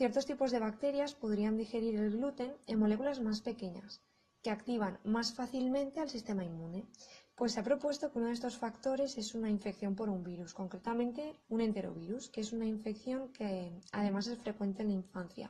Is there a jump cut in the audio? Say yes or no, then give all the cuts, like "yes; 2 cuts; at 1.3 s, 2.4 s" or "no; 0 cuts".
yes; 2 cuts; at 7.2 s, 11.4 s